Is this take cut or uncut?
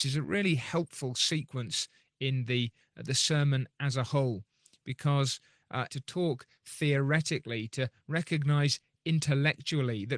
cut